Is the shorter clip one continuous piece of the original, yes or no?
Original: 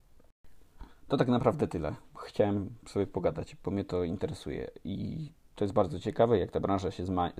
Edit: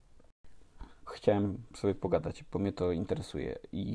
no